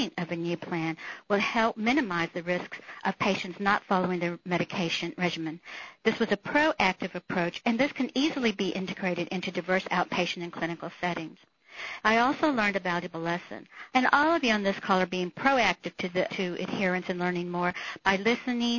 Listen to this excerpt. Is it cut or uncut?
cut